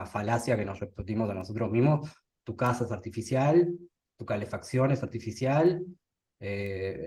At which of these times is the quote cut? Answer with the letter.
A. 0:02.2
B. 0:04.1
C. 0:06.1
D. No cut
A